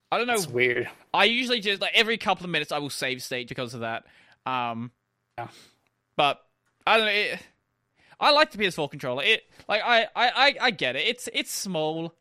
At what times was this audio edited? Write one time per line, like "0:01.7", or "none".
0:03.5